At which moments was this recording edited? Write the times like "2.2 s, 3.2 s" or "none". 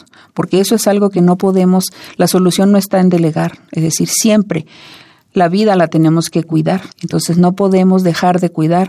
6.9 s